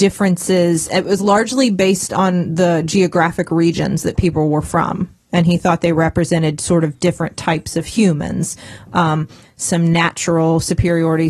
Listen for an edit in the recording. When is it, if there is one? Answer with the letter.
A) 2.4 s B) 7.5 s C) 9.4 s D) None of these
C